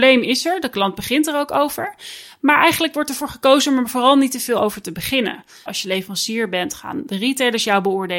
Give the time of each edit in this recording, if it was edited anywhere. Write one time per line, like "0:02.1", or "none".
0:05.7